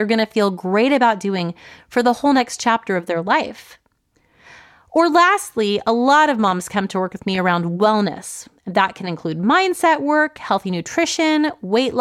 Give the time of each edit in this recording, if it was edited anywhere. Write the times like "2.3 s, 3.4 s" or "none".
none

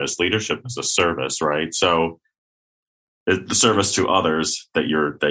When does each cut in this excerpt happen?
none

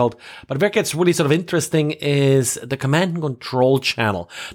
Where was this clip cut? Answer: none

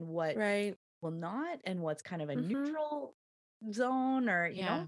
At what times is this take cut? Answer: none

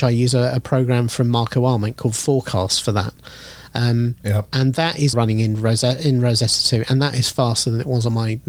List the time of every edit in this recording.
5.1 s

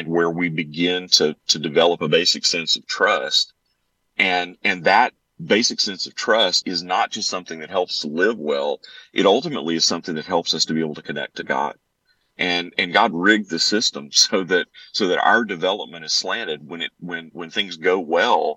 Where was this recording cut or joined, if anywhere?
6.6 s

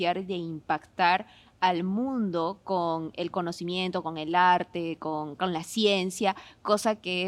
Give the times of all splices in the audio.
none

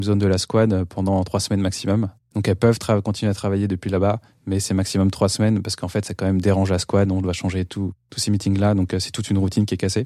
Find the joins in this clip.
2.2 s

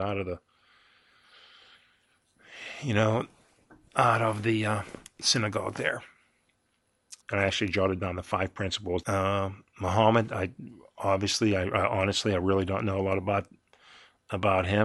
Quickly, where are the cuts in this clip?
7.2 s, 9.0 s

